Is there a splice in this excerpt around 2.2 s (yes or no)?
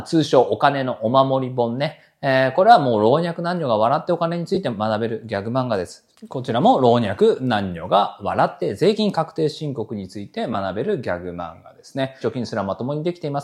no